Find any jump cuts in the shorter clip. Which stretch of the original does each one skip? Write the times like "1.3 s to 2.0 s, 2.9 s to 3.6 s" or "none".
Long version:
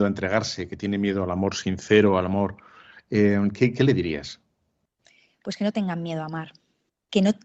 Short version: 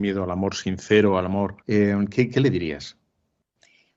2.6 s to 3.0 s